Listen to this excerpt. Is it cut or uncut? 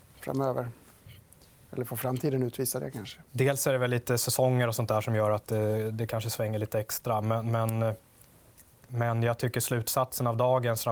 uncut